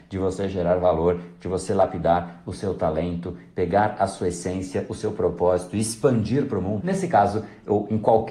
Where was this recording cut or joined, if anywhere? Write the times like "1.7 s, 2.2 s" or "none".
6.8 s